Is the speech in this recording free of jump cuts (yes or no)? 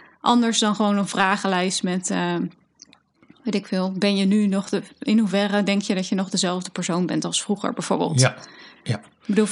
yes